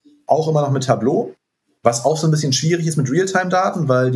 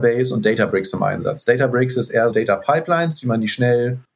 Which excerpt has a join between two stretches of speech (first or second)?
second